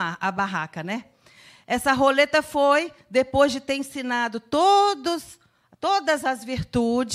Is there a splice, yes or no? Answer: no